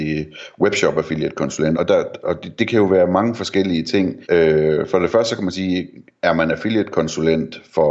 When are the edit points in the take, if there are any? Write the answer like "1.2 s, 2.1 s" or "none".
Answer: 1.7 s, 4.2 s